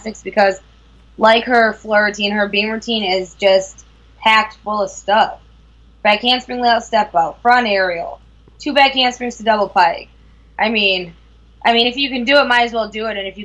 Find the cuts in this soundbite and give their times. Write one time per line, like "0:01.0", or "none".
none